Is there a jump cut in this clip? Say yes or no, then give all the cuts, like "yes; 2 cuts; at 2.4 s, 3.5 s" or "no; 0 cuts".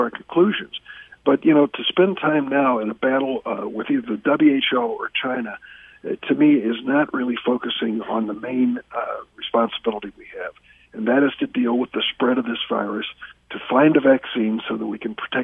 no; 0 cuts